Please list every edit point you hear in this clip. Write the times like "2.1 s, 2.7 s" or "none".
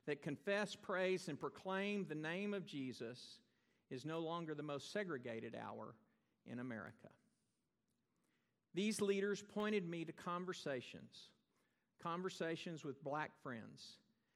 none